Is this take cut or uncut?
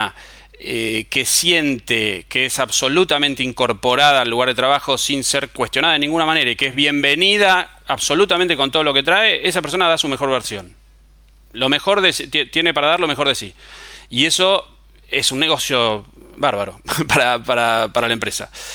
uncut